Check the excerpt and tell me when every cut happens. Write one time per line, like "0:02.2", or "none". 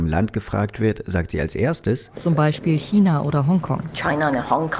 0:02.1